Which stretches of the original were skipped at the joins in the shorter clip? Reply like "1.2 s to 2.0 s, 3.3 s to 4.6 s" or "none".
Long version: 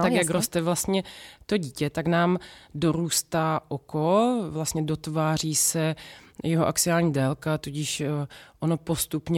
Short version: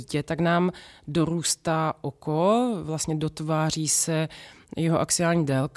none